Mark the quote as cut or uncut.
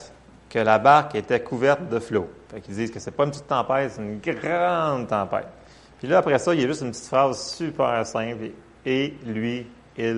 uncut